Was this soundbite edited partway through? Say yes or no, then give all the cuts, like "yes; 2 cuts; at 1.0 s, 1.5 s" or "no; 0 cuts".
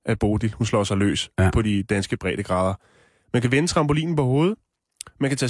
no; 0 cuts